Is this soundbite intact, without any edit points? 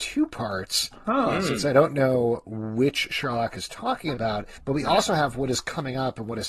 no; 1 cut; at 4.6 s

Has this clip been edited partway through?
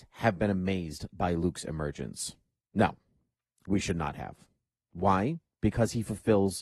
no; 0 cuts

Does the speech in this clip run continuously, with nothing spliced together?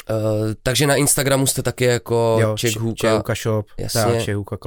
yes; 0 cuts

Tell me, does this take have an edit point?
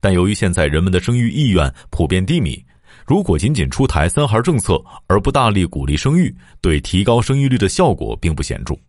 no; 0 cuts

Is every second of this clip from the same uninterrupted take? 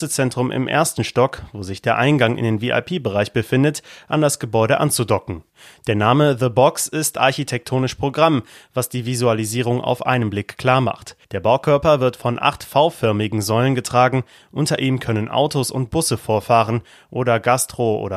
no; 1 cut; at 11.2 s

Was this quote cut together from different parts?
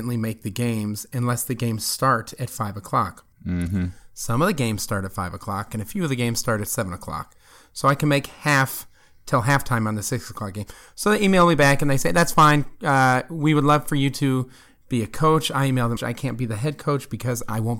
yes; 3 cuts; at 3.3 s, 5.7 s, 16.0 s

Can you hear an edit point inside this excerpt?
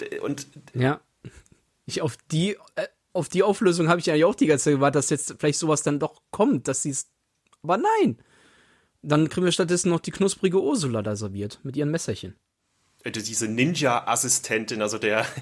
no; 0 cuts

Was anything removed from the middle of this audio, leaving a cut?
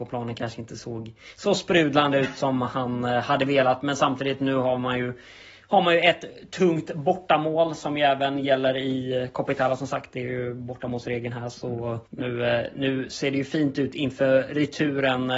yes; 1 cut; at 12.1 s

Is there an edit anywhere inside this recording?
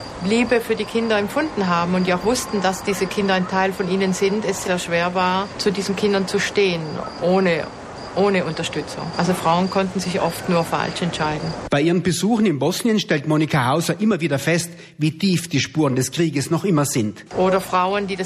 yes; 2 cuts; at 4.6 s, 17.3 s

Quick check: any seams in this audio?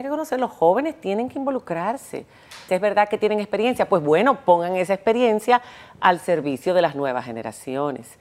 yes; 1 cut; at 2.7 s

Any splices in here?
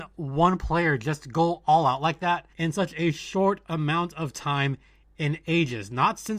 yes; 1 cut; at 2.5 s

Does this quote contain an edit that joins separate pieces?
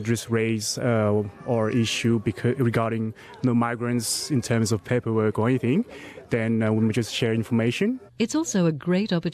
yes; 1 cut; at 8.1 s

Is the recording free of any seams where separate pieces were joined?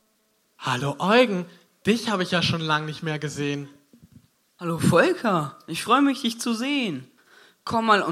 yes; 0 cuts

